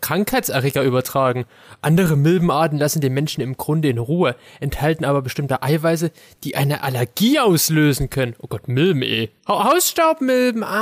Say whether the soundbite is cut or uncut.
cut